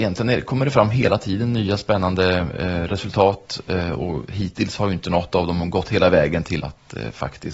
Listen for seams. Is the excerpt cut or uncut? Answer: cut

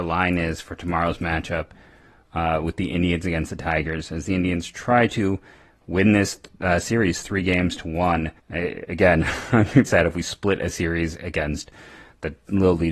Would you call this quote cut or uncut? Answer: cut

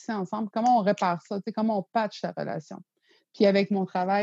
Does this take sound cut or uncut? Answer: uncut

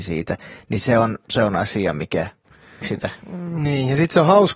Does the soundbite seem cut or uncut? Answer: cut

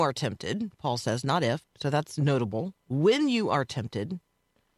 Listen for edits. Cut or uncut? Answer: cut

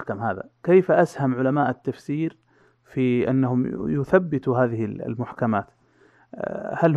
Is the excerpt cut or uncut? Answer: uncut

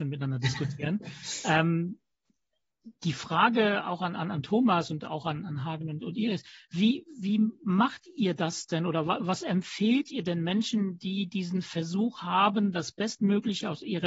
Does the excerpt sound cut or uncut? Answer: uncut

